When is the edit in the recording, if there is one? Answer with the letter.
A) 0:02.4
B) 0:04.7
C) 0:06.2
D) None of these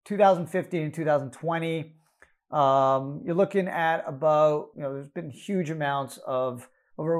B